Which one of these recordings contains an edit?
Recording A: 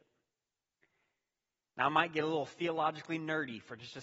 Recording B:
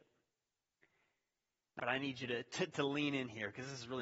B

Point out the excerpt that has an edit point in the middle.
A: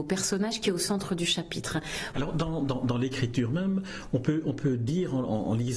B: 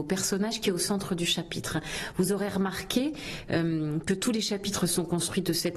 A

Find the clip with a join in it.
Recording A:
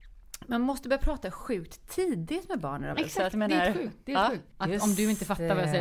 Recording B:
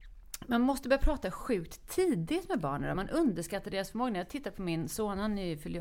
A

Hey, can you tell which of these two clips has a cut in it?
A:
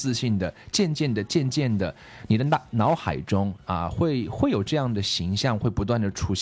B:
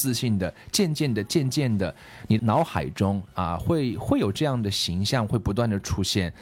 B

